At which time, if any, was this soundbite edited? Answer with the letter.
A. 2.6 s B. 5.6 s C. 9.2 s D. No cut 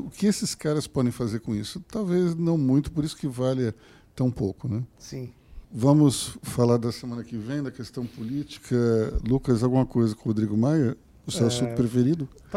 B